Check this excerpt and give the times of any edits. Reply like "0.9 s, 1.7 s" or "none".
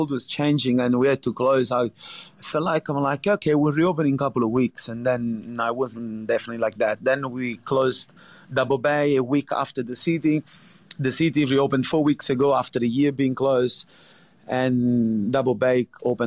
none